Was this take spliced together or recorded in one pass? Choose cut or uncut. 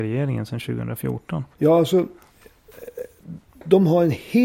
cut